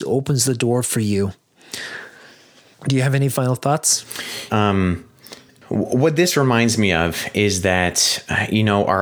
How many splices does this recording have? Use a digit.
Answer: 1